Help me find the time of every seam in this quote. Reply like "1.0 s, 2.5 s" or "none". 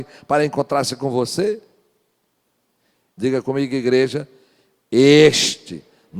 3.2 s